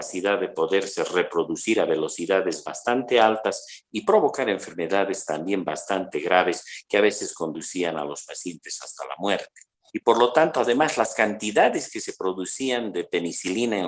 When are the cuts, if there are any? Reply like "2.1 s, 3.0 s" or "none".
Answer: 9.9 s